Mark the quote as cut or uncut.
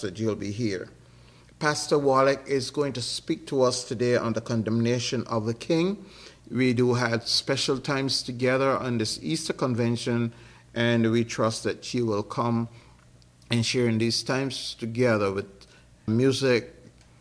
cut